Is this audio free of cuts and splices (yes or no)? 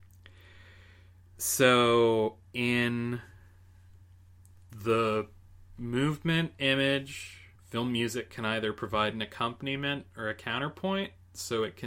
no